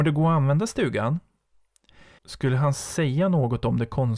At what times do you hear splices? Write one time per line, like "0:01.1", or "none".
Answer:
0:02.2